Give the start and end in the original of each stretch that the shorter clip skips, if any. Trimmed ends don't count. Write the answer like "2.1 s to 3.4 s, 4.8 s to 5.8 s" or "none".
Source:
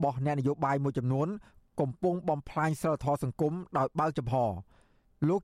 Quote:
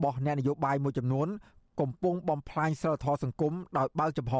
none